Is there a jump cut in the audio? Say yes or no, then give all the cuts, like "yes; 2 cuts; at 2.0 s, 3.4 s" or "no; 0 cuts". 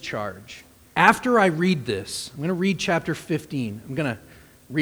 yes; 1 cut; at 0.9 s